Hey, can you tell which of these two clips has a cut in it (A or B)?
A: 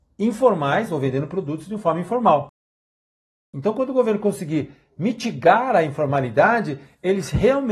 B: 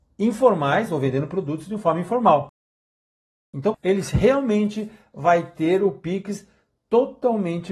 B